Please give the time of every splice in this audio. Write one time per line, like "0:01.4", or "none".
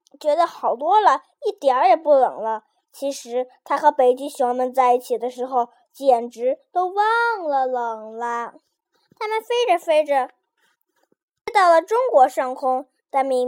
none